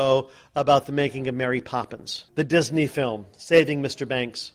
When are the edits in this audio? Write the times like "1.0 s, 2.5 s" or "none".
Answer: 2.3 s